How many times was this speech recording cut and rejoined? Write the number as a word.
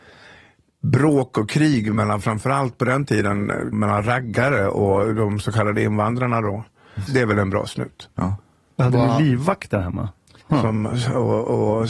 three